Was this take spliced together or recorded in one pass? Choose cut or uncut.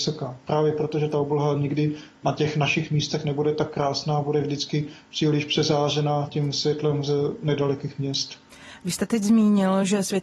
uncut